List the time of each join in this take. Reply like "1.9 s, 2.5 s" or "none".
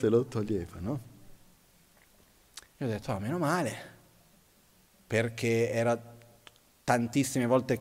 2.7 s